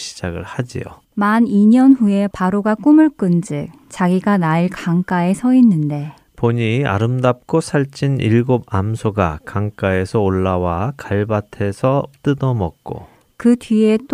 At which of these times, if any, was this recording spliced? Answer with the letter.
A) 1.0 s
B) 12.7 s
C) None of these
A